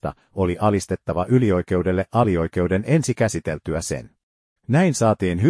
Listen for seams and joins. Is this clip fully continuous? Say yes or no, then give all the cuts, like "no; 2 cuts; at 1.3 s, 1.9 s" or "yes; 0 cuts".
no; 1 cut; at 4.6 s